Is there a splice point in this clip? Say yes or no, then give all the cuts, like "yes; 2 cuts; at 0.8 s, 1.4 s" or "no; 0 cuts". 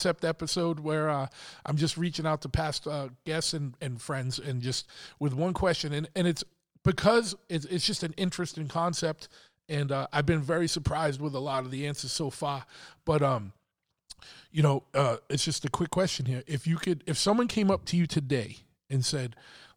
no; 0 cuts